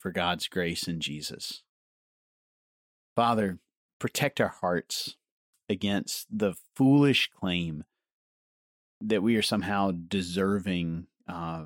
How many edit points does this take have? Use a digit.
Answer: 0